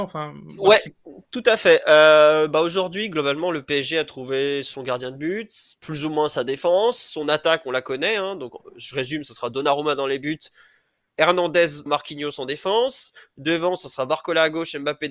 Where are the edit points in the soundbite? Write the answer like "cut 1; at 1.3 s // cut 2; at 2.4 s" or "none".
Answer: cut 1; at 11.9 s